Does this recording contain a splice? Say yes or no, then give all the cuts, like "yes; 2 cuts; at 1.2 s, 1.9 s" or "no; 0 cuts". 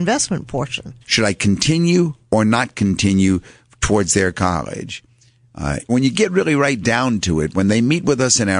yes; 2 cuts; at 1.0 s, 5.9 s